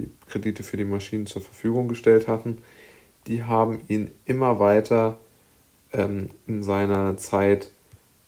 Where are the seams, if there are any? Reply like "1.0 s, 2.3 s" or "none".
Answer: none